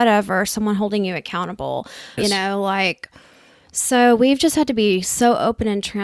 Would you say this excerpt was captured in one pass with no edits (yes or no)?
no